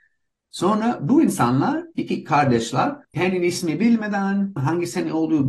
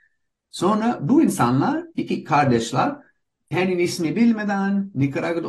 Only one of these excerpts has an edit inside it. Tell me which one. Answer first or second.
first